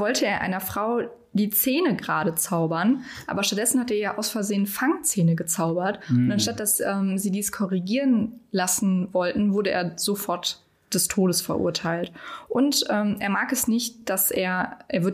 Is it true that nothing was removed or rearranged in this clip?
yes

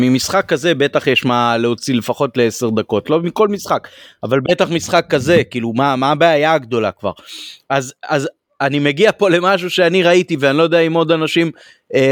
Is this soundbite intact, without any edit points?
yes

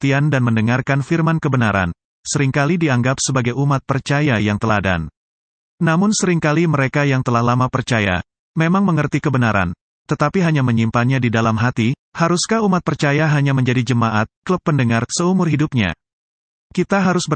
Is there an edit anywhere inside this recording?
yes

